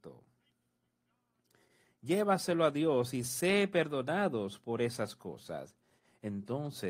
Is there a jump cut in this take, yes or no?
no